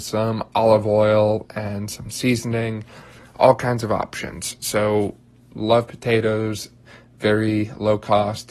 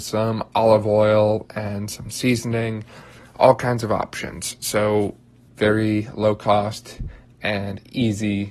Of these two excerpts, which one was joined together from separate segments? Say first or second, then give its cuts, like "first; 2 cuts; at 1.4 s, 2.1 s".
second; 1 cut; at 5.5 s